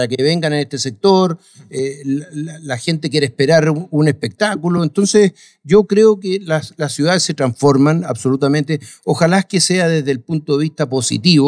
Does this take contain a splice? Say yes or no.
no